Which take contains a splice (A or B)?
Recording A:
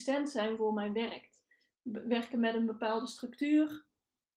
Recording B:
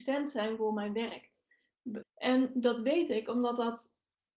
B